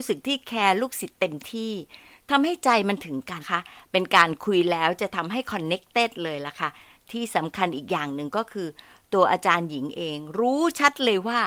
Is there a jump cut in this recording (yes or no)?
yes